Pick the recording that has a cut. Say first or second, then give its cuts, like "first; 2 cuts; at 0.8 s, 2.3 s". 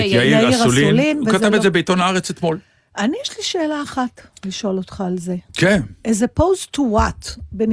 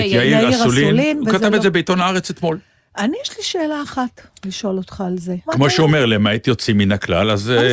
second; 1 cut; at 5.5 s